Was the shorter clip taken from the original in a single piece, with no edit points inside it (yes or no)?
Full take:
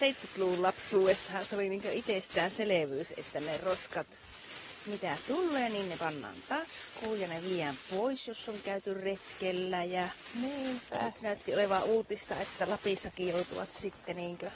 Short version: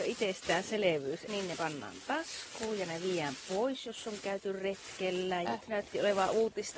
no